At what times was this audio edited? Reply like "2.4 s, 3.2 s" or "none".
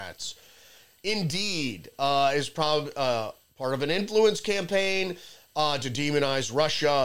none